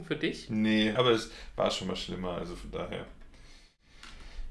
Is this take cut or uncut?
cut